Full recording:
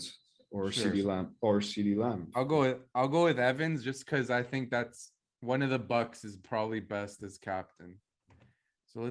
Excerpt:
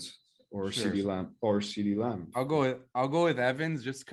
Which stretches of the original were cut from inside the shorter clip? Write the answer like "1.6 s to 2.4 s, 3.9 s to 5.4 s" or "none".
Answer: none

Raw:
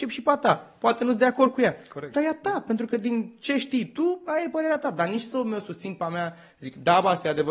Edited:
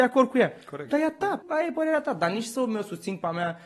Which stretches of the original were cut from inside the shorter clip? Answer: 2.7 s to 4.2 s

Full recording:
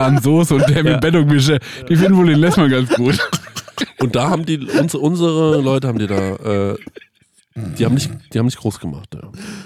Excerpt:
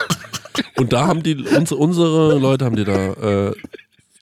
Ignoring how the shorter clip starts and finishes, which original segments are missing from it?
none

